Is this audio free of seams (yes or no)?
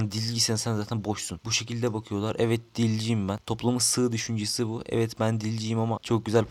yes